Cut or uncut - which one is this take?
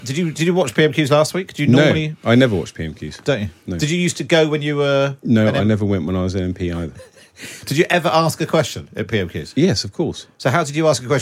uncut